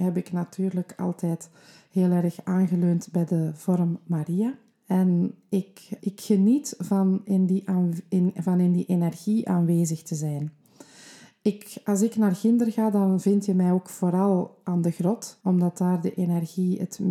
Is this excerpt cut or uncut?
cut